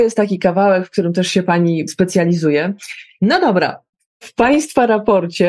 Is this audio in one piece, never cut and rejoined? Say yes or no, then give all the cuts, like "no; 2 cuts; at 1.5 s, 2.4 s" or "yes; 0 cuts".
no; 1 cut; at 3.2 s